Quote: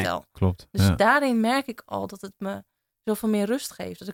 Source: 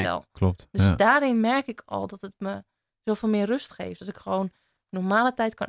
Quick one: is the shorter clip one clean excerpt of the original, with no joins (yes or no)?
yes